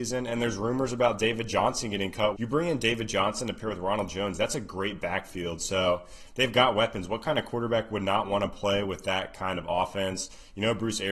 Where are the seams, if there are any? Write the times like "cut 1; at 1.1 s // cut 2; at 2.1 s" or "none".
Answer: cut 1; at 2.3 s